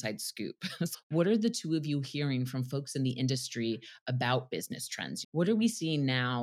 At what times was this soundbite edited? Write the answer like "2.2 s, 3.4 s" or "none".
0.9 s, 5.2 s